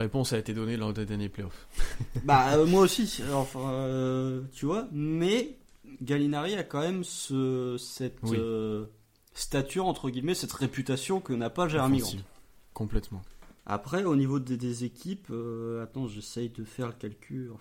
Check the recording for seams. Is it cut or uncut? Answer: uncut